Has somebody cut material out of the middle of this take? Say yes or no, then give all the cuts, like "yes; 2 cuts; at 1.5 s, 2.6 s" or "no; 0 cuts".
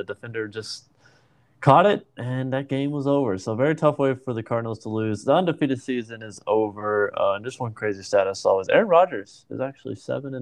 no; 0 cuts